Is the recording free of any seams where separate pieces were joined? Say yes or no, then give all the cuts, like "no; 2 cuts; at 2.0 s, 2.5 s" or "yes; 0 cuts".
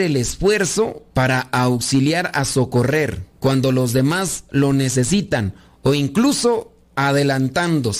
no; 2 cuts; at 1.1 s, 3.3 s